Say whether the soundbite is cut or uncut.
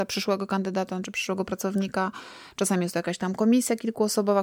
uncut